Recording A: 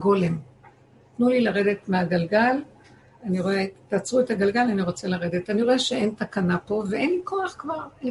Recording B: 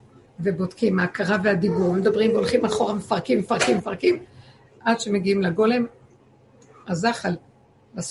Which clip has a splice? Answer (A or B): B